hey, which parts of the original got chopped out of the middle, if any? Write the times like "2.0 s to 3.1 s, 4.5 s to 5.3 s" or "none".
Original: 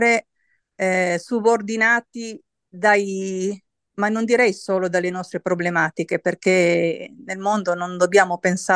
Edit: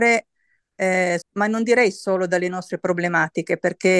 1.2 s to 3.8 s